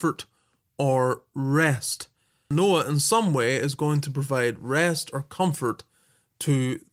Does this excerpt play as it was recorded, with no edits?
yes; 0 cuts

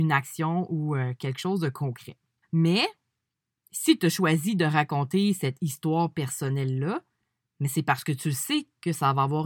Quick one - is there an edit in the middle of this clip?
yes; 1 cut; at 2.4 s

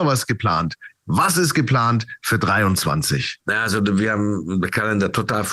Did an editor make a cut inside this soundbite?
yes; 1 cut; at 3.4 s

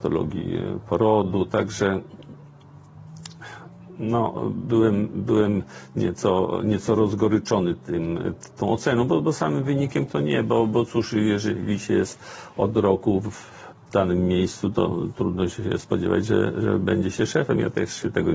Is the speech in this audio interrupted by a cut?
no; 0 cuts

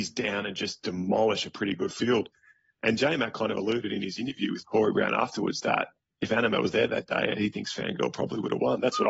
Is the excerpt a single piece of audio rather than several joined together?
yes; 0 cuts

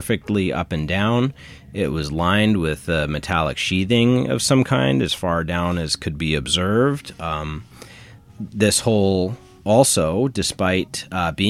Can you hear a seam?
no; 0 cuts

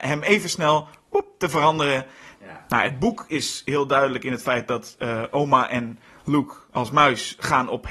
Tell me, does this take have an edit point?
yes; 1 cut; at 2.3 s

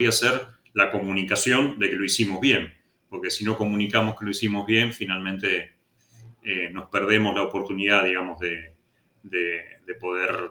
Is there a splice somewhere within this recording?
no; 0 cuts

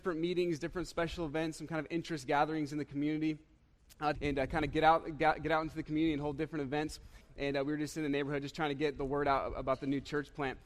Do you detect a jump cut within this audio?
yes; 2 cuts; at 4.1 s, 7.2 s

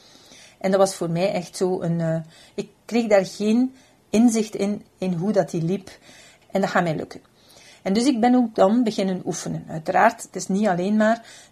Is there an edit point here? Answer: yes; 1 cut; at 6.4 s

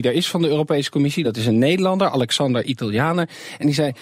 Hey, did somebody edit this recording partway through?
no; 0 cuts

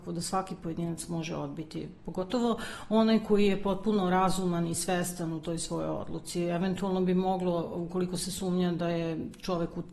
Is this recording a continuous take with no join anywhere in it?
yes; 0 cuts

